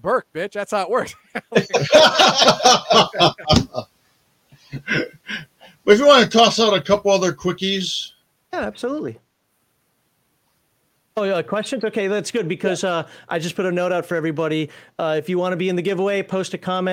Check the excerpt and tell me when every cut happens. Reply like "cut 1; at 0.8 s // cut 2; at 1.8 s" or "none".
none